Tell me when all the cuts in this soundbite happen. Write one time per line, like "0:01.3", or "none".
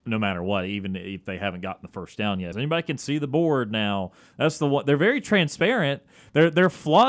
0:02.5